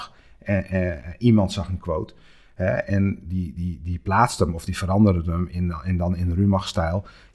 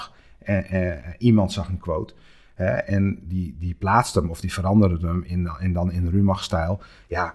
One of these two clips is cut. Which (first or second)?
second